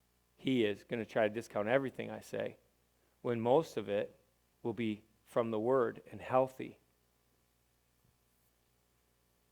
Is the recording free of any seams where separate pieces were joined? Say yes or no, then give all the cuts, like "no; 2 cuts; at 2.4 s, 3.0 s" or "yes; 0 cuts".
no; 1 cut; at 4.5 s